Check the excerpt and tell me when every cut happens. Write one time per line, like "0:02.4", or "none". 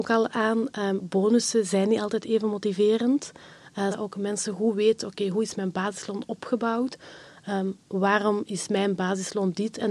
0:03.9